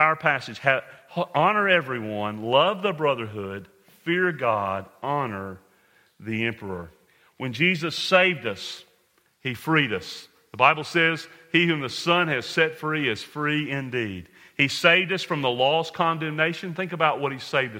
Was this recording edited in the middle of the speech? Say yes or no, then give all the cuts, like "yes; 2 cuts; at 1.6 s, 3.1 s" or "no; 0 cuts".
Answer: no; 0 cuts